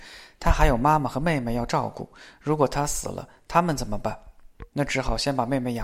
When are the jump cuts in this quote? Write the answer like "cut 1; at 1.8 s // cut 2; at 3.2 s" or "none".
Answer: none

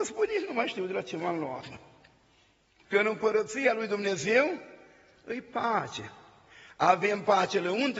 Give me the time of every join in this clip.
cut 1; at 2.8 s

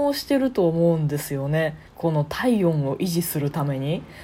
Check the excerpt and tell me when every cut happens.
cut 1; at 1.9 s

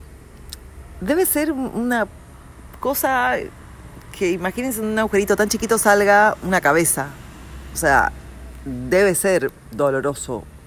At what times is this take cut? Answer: none

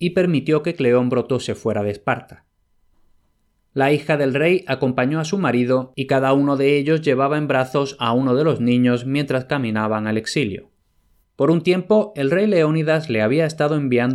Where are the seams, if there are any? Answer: cut 1; at 11.2 s

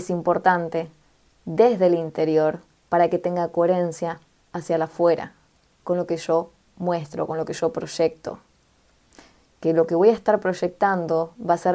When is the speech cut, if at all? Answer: none

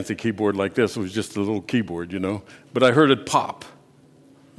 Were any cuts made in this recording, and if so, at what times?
none

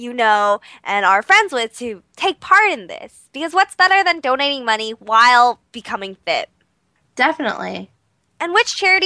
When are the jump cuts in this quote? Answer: none

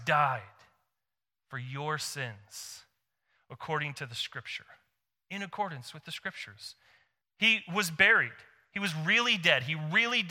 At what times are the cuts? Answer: cut 1; at 7.2 s

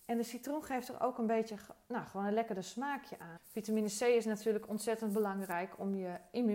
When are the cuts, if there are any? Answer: cut 1; at 3.4 s

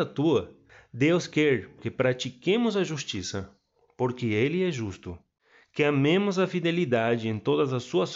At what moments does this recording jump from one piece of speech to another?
cut 1; at 1.8 s

